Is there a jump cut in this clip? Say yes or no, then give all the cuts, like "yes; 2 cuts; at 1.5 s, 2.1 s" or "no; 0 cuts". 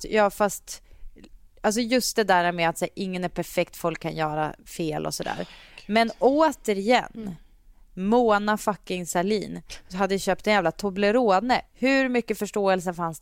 no; 0 cuts